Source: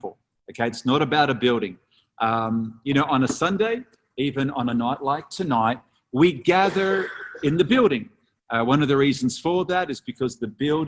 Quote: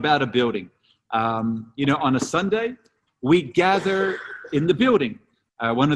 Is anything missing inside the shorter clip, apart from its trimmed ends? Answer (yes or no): yes